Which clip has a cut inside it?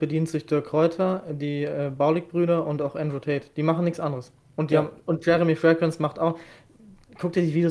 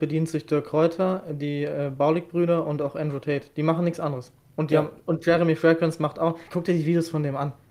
second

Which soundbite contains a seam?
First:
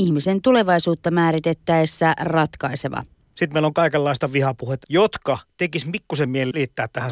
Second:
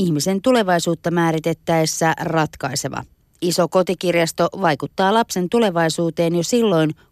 first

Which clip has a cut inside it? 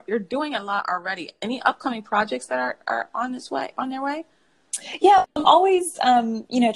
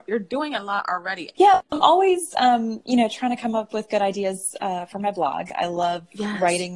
second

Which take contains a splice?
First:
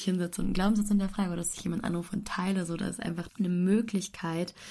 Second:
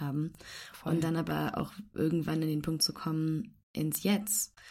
first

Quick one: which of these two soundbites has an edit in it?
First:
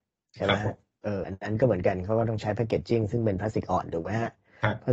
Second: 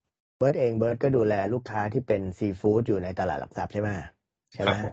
first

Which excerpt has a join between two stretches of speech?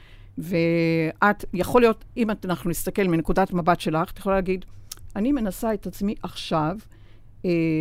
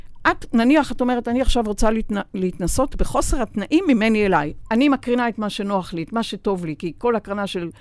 second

